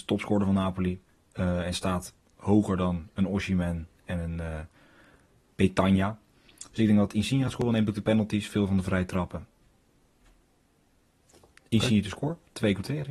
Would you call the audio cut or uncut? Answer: uncut